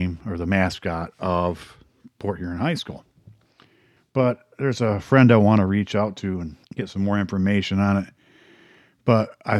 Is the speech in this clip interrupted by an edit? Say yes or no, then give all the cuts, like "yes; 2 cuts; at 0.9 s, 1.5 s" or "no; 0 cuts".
yes; 2 cuts; at 4.0 s, 6.6 s